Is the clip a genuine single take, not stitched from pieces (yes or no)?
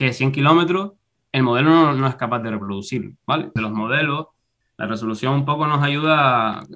no